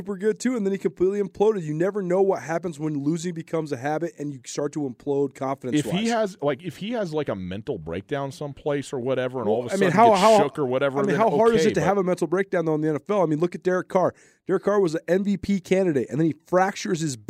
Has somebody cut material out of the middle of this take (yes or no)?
no